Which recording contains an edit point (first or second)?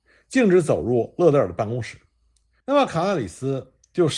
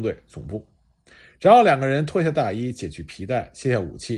first